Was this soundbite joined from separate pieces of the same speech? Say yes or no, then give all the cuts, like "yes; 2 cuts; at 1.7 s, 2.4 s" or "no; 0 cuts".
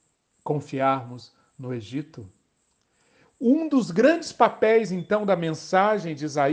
no; 0 cuts